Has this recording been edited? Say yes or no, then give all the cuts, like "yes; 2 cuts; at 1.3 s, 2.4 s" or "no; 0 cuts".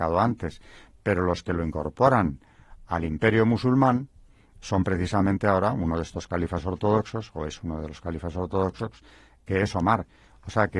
no; 0 cuts